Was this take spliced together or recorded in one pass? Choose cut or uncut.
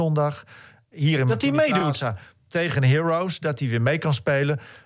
uncut